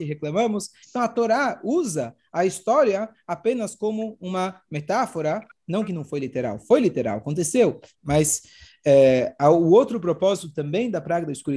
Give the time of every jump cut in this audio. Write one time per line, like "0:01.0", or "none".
0:08.0